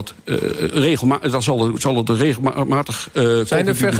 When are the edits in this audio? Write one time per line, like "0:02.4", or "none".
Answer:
none